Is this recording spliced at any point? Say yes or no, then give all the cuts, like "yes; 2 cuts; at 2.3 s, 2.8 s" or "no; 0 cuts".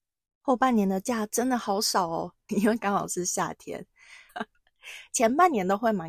yes; 2 cuts; at 2.5 s, 4.3 s